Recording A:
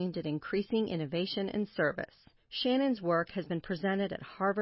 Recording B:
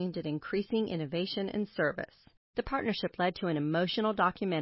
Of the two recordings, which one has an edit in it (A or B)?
B